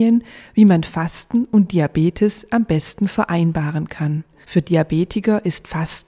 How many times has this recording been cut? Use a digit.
1